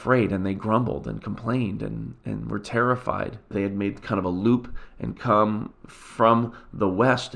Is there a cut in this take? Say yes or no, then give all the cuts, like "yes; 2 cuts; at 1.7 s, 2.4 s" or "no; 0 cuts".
yes; 2 cuts; at 3.5 s, 5.7 s